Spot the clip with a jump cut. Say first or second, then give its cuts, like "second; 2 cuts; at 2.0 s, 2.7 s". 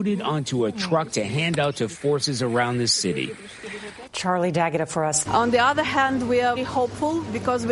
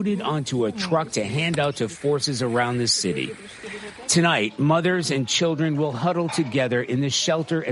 first; 3 cuts; at 4.1 s, 5.3 s, 6.6 s